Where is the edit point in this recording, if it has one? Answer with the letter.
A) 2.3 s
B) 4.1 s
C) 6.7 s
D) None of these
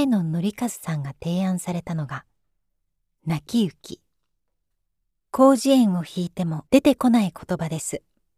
C